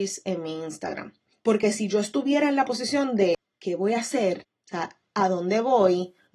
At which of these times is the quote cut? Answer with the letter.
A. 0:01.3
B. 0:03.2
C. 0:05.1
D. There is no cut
A